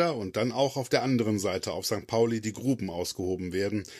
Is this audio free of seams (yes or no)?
yes